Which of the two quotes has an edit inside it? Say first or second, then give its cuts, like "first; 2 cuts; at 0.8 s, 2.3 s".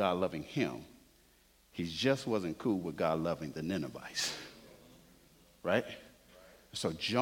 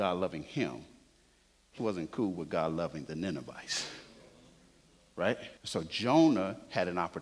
second; 2 cuts; at 1.8 s, 5.6 s